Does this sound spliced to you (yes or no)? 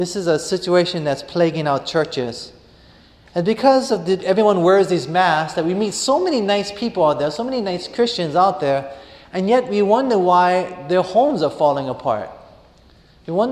no